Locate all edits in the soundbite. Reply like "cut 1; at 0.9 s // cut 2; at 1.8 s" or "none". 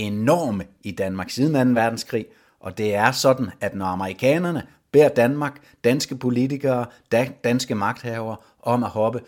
none